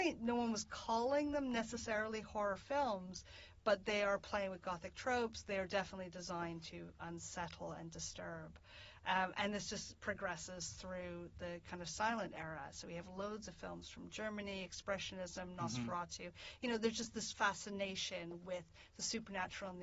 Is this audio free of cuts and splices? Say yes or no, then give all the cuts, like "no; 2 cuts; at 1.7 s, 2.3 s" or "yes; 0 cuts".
yes; 0 cuts